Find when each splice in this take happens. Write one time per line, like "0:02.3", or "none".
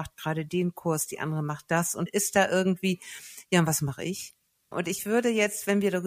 0:02.1
0:04.7